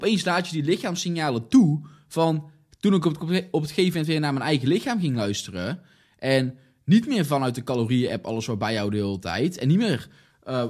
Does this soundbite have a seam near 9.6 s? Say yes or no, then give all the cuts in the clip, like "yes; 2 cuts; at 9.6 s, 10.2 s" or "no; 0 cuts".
no; 1 cut; at 2.7 s